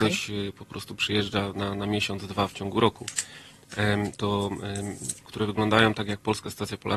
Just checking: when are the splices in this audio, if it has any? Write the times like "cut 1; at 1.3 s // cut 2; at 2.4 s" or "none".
cut 1; at 4.2 s // cut 2; at 5.2 s